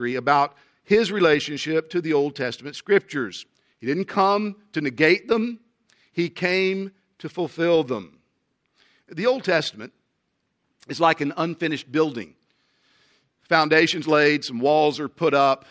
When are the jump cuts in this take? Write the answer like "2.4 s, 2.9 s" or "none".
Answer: none